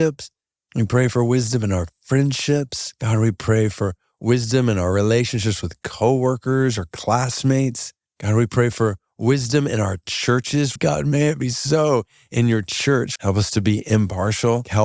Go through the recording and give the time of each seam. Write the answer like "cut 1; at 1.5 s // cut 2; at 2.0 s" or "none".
cut 1; at 10.8 s // cut 2; at 13.2 s